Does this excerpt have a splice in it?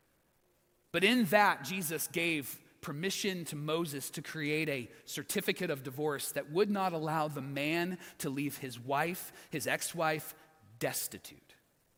no; 0 cuts

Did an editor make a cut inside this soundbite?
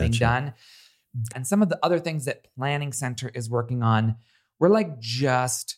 yes; 1 cut; at 1.3 s

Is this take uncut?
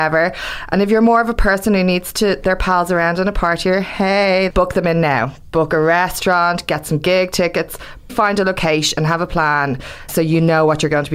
no; 3 cuts; at 4.5 s, 8.1 s, 10.1 s

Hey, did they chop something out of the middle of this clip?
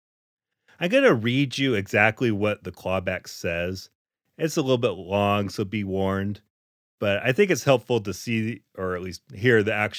no; 0 cuts

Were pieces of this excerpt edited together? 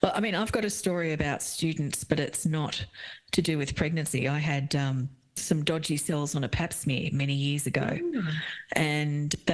no; 0 cuts

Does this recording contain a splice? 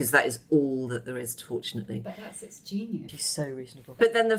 yes; 1 cut; at 3.1 s

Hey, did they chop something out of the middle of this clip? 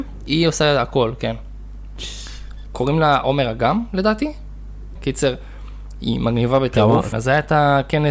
yes; 2 cuts; at 5.0 s, 7.1 s

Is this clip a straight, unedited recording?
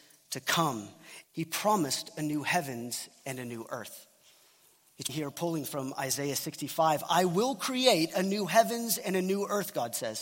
no; 2 cuts; at 1.2 s, 5.1 s

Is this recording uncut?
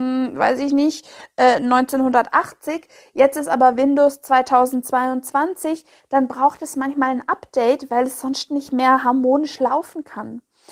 yes; 0 cuts

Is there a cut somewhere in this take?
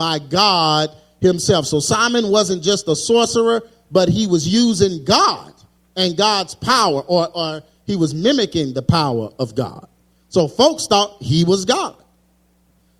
no; 0 cuts

